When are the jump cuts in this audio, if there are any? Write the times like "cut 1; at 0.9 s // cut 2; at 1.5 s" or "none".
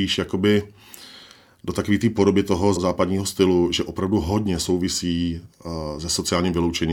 cut 1; at 2.8 s